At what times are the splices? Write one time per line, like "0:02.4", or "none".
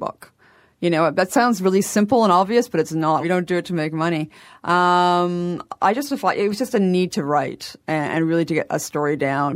0:03.2